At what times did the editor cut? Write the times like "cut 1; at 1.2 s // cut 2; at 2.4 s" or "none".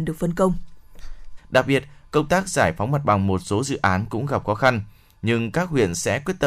cut 1; at 1.4 s